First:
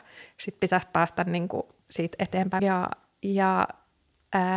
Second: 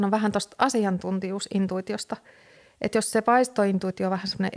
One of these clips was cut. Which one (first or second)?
first